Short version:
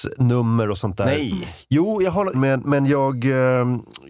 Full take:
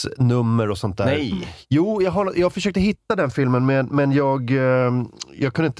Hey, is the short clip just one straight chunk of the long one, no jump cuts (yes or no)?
no